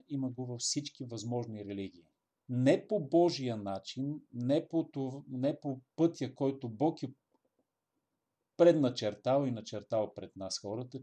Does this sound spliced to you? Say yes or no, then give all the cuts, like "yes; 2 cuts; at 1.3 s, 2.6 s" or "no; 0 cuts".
yes; 1 cut; at 2.4 s